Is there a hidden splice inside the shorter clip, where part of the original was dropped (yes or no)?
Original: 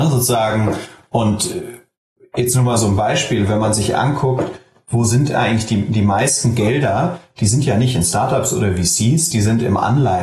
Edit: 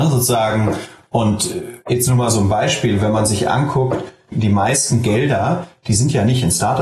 yes